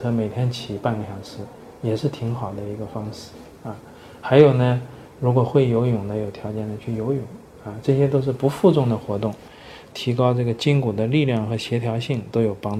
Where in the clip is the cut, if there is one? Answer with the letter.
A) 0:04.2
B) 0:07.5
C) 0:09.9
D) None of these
C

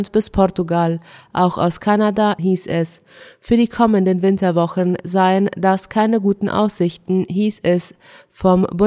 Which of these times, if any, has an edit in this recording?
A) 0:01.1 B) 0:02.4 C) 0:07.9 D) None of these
B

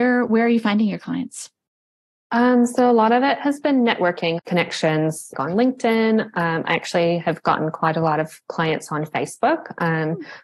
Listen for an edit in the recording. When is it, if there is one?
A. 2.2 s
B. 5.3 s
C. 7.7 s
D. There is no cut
B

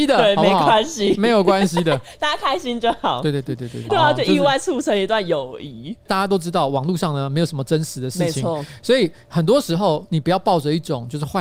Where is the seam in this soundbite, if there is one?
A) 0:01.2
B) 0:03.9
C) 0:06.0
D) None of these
B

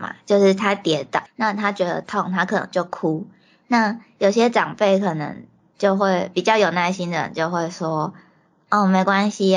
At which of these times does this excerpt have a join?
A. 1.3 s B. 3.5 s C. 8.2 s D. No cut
A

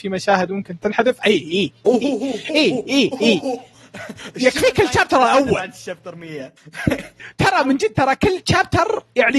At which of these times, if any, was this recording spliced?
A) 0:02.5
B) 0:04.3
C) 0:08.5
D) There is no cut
D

